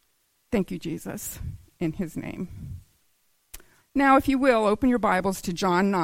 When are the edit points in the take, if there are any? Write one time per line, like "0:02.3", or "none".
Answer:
0:03.8